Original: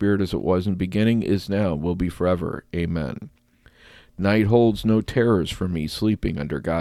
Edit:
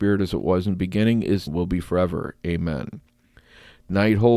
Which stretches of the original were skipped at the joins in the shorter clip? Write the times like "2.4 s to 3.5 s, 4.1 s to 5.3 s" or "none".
1.5 s to 1.8 s